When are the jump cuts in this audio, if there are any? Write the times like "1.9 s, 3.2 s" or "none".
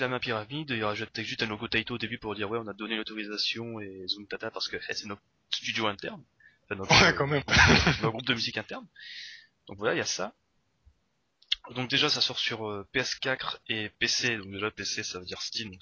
none